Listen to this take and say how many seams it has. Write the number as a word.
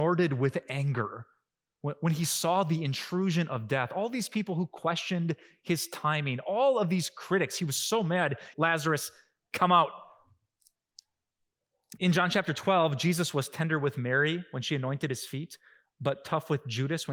two